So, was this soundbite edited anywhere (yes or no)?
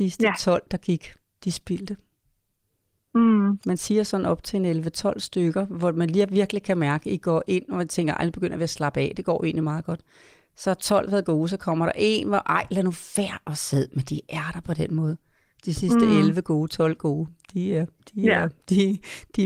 no